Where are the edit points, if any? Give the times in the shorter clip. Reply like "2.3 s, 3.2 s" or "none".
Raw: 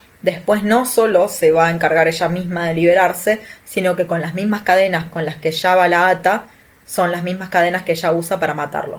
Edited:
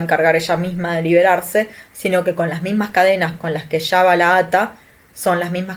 none